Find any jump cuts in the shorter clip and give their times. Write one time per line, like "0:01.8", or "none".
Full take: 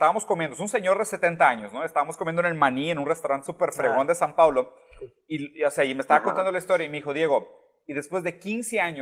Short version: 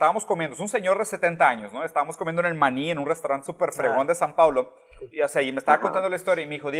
0:05.1